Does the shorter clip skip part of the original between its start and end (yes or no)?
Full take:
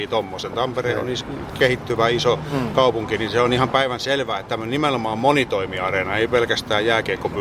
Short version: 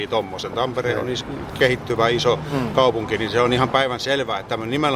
no